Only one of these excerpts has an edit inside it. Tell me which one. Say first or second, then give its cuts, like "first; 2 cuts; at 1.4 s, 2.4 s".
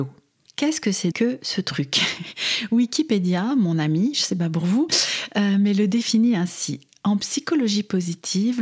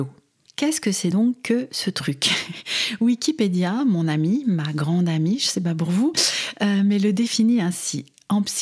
first; 2 cuts; at 1.1 s, 4.1 s